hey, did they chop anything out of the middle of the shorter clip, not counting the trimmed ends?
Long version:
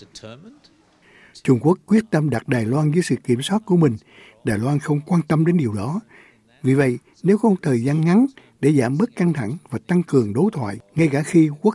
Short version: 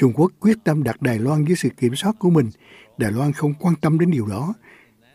no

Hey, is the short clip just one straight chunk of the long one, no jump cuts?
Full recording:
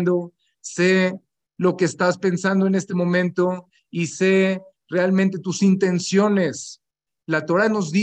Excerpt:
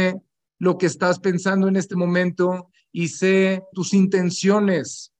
no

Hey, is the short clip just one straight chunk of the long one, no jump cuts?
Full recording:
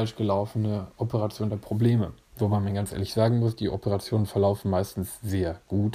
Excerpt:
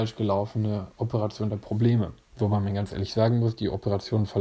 yes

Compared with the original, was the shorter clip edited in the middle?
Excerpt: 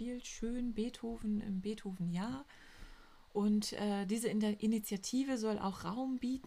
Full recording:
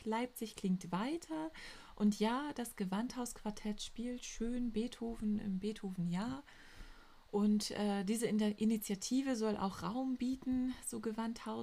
no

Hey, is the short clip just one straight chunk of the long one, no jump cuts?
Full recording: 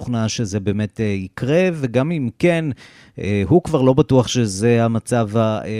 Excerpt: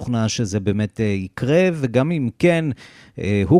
yes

